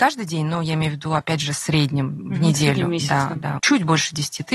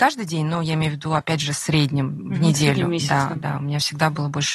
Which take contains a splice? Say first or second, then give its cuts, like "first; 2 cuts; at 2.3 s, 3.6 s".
first; 1 cut; at 3.6 s